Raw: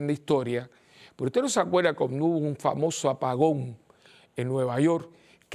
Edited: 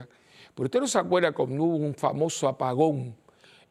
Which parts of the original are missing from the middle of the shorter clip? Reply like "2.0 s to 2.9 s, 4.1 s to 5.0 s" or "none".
none